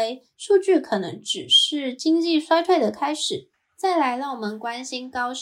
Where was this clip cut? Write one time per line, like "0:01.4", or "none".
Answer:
0:03.5